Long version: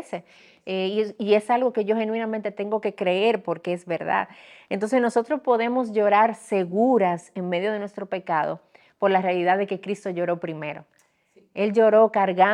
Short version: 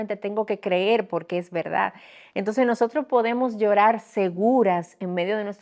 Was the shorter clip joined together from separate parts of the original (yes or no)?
no